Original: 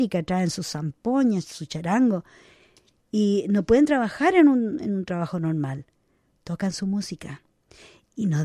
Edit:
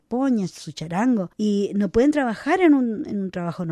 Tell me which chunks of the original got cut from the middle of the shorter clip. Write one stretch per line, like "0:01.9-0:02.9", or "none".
0:02.3-0:03.1